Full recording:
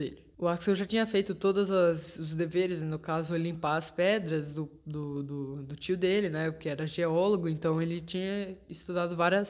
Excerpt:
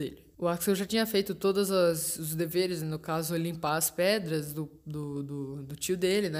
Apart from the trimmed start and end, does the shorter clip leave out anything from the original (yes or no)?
no